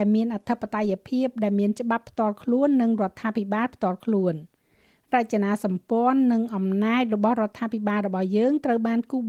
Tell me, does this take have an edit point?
no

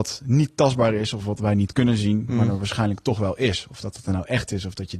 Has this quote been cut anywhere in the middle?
no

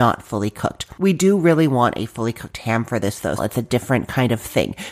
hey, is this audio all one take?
no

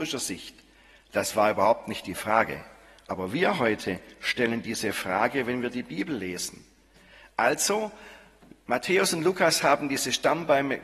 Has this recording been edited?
no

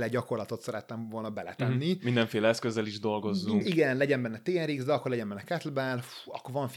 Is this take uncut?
yes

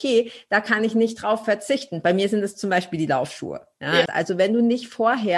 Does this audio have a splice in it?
yes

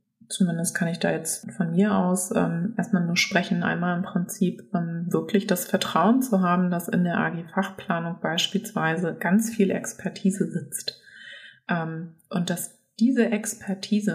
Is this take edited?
no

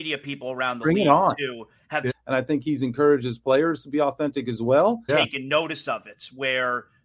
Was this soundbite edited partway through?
yes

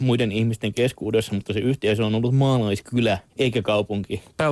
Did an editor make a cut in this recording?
yes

